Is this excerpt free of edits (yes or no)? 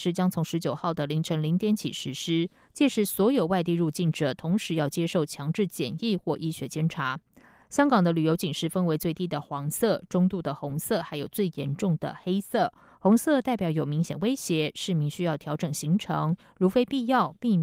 yes